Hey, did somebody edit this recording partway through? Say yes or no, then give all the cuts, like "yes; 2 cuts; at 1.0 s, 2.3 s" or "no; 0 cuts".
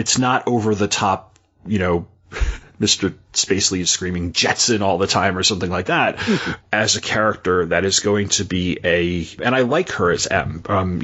yes; 2 cuts; at 6.6 s, 9.4 s